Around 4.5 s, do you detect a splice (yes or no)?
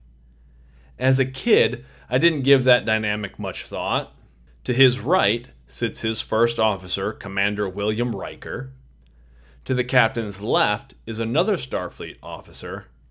yes